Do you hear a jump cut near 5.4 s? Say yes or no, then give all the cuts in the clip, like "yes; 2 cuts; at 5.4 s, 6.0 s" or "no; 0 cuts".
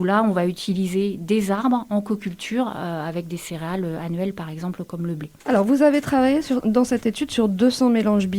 yes; 2 cuts; at 5.4 s, 6.6 s